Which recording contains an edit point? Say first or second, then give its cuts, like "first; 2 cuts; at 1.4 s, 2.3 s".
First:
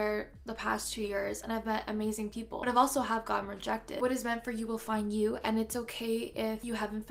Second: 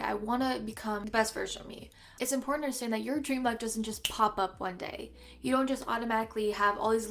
second; 1 cut; at 2.2 s